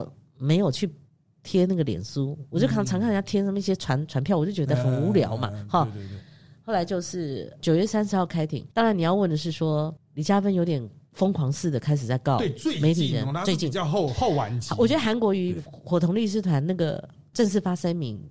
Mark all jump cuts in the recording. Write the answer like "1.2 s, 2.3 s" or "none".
8.7 s, 10.0 s